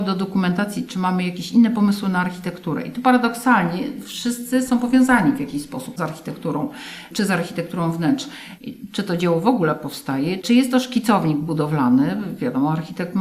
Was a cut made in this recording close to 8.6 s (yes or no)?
yes